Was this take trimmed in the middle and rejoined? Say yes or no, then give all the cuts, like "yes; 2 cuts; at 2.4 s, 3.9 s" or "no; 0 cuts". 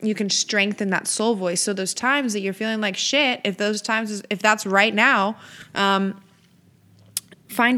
no; 0 cuts